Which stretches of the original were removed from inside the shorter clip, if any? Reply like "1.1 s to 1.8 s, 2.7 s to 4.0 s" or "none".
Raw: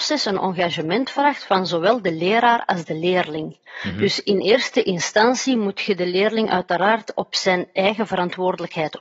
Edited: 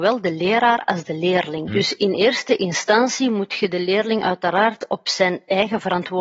3.5 s to 3.9 s